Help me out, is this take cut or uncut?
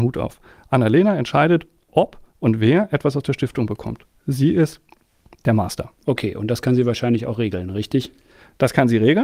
cut